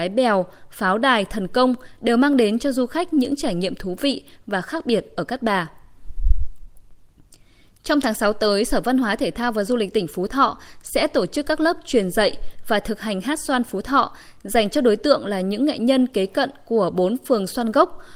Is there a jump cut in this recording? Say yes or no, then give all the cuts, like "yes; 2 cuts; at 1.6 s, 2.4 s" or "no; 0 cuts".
no; 0 cuts